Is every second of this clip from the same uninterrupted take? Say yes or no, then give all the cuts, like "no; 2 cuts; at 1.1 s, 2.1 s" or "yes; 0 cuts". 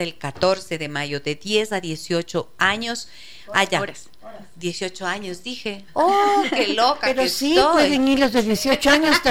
yes; 0 cuts